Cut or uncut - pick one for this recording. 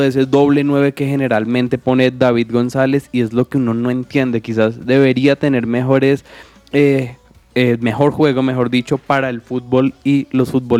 uncut